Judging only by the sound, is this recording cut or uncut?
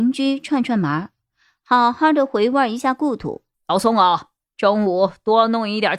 cut